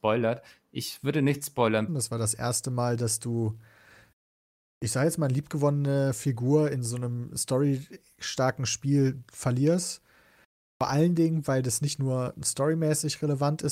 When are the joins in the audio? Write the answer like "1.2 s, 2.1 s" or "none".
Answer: 1.9 s